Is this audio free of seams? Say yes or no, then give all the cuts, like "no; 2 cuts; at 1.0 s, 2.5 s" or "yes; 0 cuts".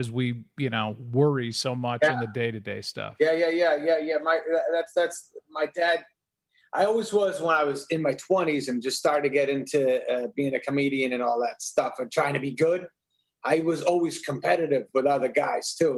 yes; 0 cuts